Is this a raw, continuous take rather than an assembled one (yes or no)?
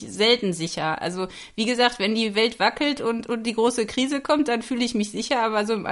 yes